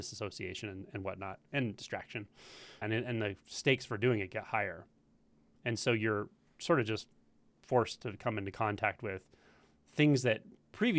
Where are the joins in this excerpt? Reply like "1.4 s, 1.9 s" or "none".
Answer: 2.8 s

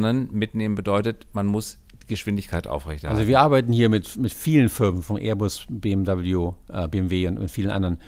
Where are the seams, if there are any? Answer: none

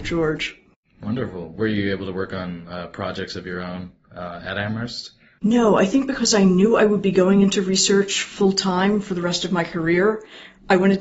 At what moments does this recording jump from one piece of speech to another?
none

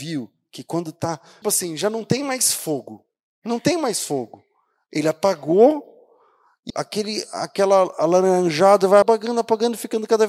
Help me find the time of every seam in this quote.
1.4 s, 6.7 s, 9.0 s

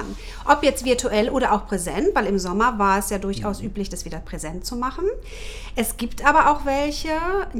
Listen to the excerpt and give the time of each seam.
none

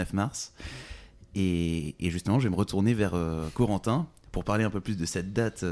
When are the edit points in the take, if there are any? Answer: none

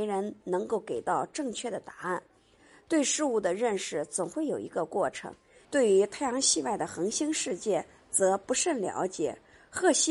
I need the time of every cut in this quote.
5.6 s

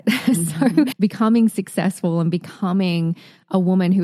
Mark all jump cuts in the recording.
0.9 s

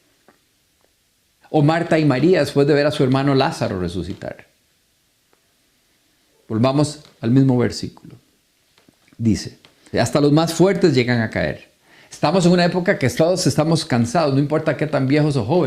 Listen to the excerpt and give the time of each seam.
1.4 s, 9.9 s

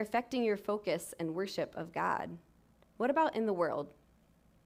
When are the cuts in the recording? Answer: 2.8 s

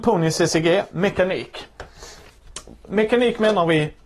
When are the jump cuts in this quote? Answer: none

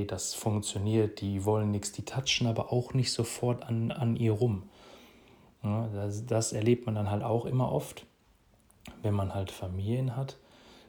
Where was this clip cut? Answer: none

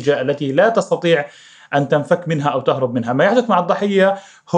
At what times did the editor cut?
none

